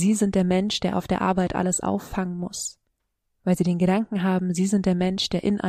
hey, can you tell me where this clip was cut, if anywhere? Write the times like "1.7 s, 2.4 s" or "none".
none